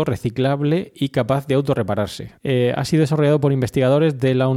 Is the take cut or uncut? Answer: cut